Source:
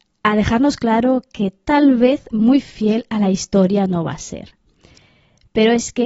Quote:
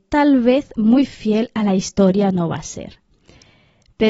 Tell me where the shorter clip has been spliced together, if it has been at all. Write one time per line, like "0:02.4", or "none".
none